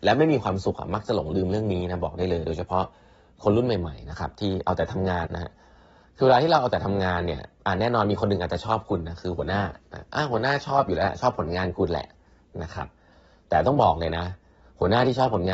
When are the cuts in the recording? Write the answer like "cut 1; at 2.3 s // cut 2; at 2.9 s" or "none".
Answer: cut 1; at 5.3 s